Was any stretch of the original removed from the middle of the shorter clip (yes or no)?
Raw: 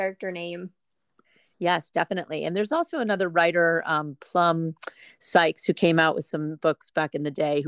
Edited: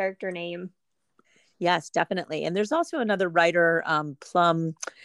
no